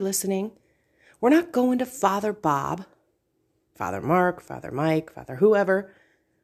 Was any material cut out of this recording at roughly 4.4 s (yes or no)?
no